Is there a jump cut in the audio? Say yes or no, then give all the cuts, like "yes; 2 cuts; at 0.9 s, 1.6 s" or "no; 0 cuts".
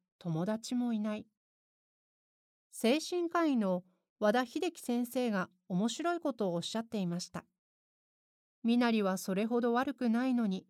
yes; 2 cuts; at 2.5 s, 8.5 s